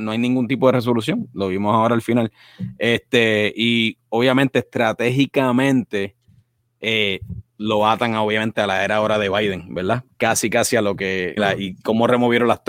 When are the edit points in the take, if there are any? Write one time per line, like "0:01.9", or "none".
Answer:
0:11.4